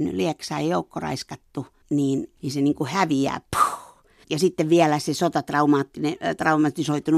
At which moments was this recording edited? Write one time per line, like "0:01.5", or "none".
0:04.2